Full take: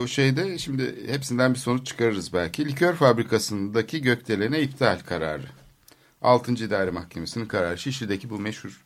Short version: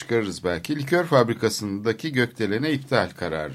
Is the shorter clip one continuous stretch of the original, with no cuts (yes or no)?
yes